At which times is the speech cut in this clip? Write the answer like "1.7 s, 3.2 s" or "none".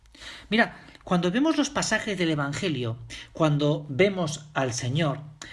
none

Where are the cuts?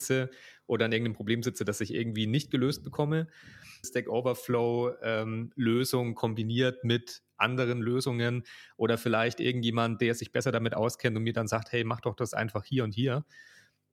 3.8 s

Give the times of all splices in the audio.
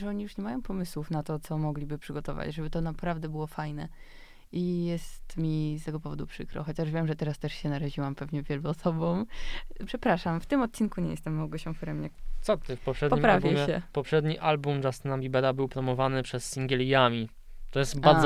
9.9 s

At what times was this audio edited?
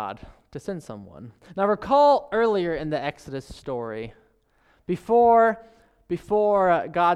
none

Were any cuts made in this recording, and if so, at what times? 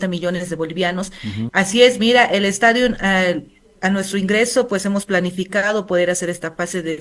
1.5 s

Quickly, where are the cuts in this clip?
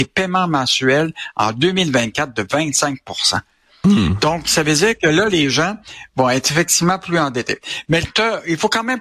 none

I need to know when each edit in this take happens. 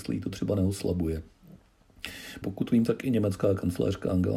2.4 s

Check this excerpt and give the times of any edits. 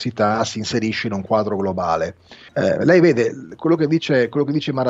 2.5 s

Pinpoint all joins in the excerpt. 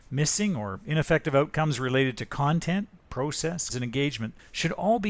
3.7 s

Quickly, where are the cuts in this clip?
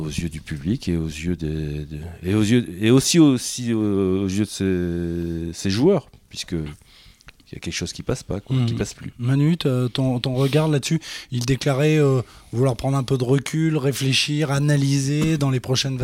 none

